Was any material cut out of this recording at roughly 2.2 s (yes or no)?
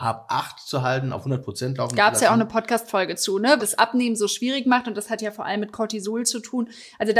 no